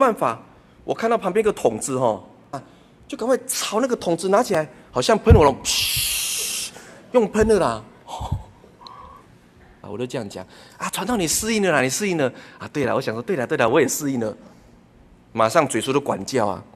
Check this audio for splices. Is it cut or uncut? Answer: cut